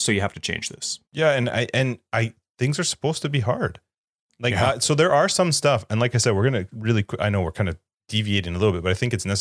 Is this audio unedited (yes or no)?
no